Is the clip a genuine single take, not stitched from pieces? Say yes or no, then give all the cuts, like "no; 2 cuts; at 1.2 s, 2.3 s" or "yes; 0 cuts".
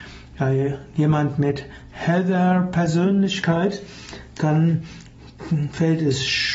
yes; 0 cuts